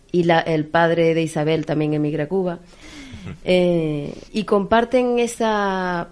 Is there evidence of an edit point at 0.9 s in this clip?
no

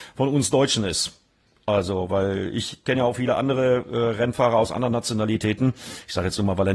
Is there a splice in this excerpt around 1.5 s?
no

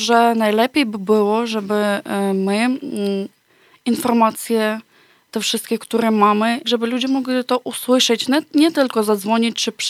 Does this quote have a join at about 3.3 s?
no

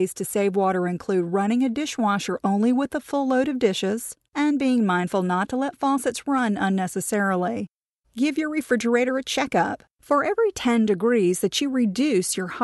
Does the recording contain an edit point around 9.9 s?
yes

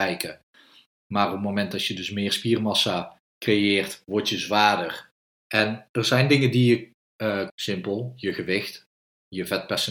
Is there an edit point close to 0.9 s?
no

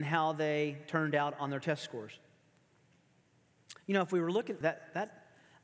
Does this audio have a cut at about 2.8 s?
no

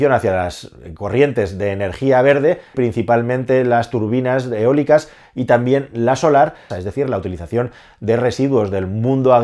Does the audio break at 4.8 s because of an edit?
no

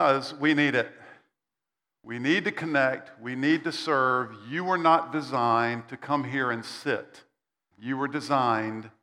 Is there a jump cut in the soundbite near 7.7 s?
yes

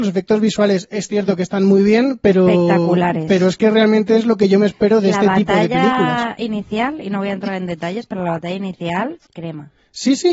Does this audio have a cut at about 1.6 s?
no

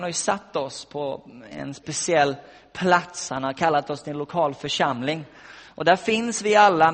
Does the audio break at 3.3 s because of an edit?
no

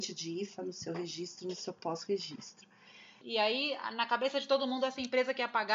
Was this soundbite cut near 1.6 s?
no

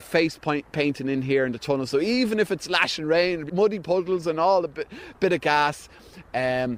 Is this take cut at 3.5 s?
yes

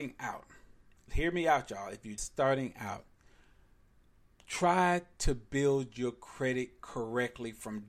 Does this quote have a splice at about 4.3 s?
no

